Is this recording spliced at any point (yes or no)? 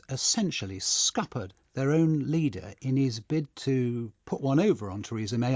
no